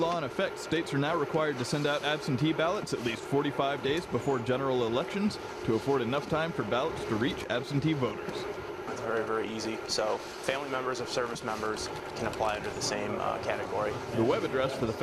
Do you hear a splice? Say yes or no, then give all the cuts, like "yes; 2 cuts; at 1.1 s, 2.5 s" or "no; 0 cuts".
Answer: yes; 1 cut; at 8.9 s